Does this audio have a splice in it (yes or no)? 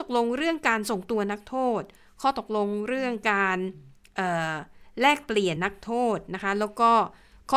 yes